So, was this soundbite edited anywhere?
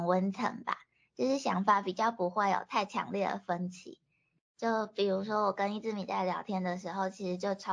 no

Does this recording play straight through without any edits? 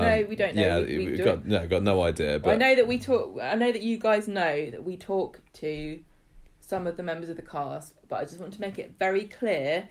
yes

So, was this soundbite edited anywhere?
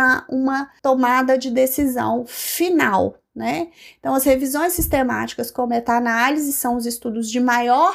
no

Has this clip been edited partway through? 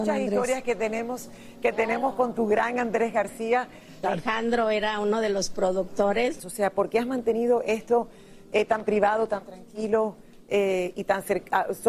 yes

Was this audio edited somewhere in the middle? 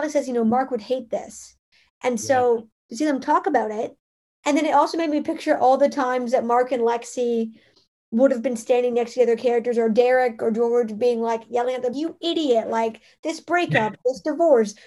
yes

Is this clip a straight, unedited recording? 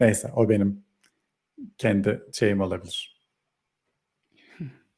yes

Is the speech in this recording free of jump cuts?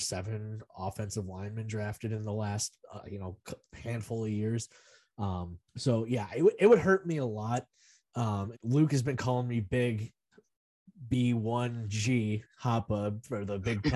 no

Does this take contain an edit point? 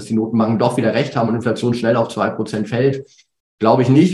no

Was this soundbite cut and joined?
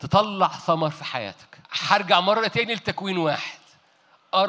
yes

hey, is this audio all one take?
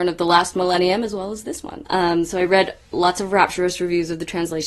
no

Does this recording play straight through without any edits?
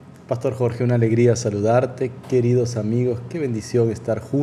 yes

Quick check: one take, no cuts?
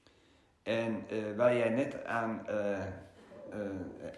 yes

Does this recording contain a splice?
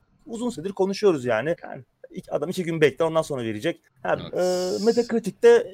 yes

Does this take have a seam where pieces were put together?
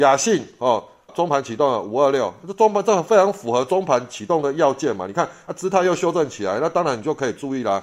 yes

